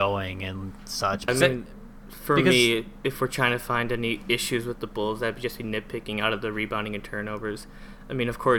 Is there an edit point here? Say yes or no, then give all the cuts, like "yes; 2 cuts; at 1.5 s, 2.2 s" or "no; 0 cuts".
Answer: yes; 1 cut; at 1.3 s